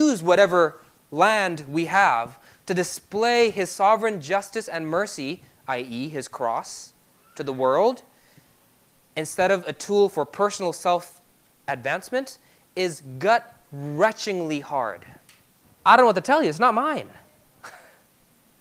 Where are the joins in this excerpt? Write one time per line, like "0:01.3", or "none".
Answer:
0:15.6